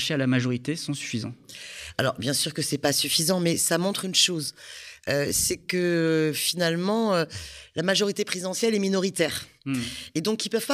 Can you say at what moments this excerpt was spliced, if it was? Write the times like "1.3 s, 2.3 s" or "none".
none